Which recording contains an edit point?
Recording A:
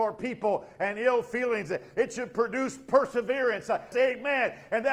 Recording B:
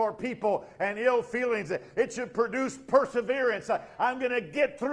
A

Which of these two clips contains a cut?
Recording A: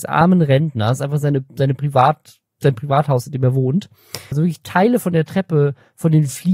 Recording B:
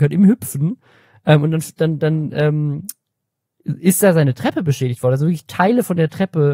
A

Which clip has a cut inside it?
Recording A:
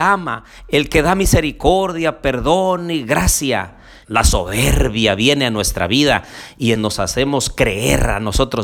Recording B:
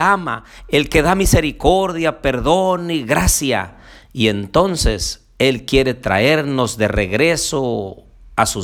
A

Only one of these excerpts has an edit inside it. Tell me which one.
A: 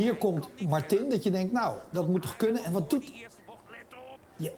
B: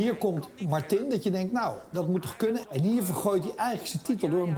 B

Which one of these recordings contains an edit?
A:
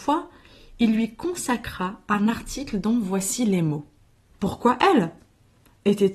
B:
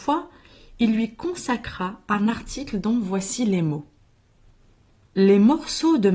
A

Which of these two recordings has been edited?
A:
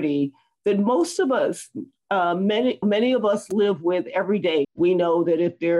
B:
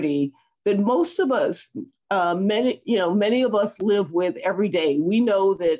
A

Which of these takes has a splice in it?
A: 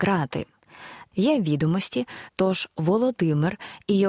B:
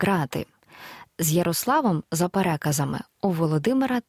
A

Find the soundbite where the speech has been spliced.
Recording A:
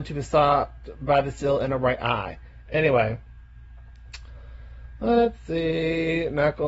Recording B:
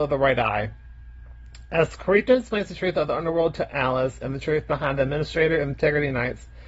A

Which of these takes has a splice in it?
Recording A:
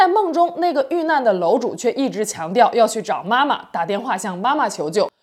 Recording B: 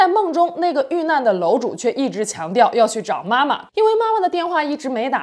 B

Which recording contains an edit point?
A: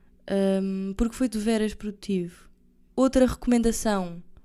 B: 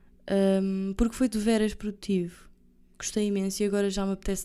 A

